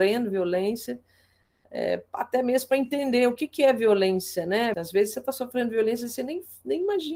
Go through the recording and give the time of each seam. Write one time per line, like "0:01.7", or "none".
0:04.7